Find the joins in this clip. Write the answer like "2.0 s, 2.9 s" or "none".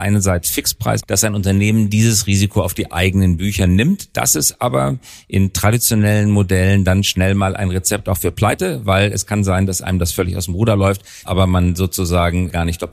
1.0 s, 11.2 s

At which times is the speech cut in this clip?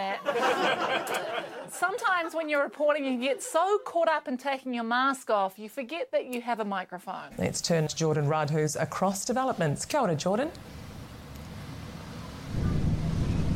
7.9 s

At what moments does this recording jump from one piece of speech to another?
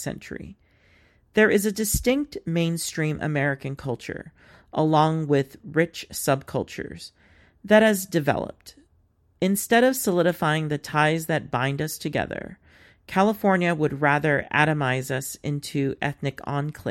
none

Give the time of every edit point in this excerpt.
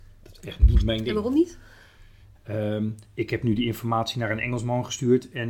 2.3 s

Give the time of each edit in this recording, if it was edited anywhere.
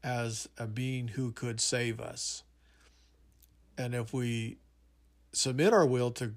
3.6 s

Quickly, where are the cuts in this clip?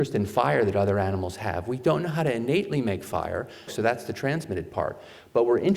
3.7 s

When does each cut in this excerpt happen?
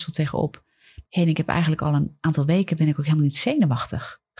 1.0 s

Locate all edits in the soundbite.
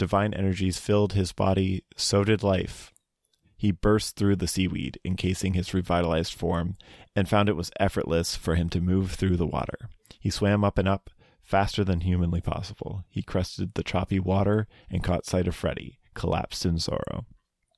none

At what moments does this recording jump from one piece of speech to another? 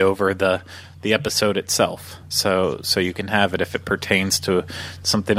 none

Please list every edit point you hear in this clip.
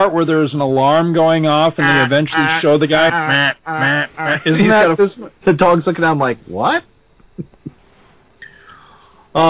3.1 s, 5.4 s

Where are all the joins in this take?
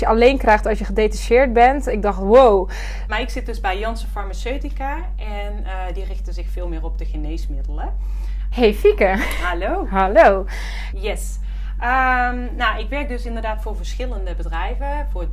3.1 s, 8.5 s, 10.9 s

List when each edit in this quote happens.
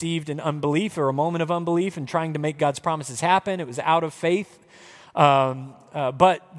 none

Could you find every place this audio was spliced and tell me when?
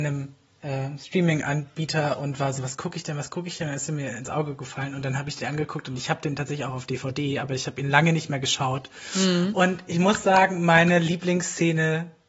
none

